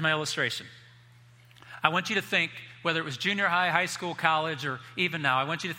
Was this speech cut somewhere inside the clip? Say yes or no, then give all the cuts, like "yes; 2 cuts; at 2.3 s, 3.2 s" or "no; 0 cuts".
no; 0 cuts